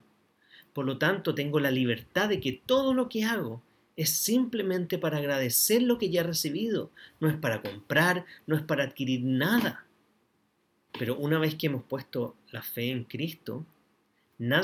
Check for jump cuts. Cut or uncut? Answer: cut